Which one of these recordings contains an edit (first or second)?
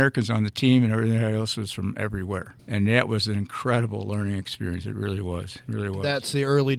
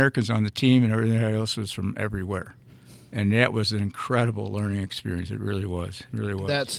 first